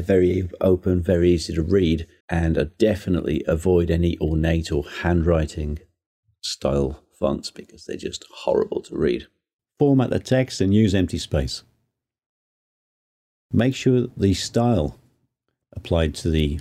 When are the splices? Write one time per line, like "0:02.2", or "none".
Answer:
0:02.2
0:09.6